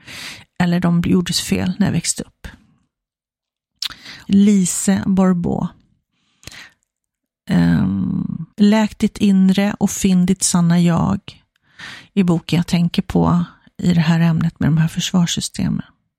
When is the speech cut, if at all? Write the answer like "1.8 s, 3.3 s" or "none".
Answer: 4.3 s, 8.5 s